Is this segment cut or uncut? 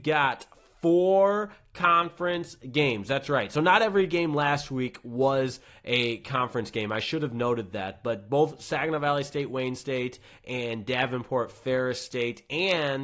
uncut